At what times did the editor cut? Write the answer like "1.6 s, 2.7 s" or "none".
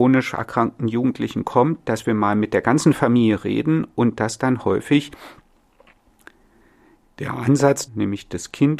7.9 s